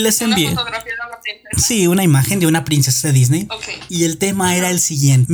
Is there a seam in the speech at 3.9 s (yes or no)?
yes